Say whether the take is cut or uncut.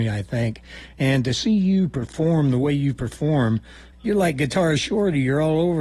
cut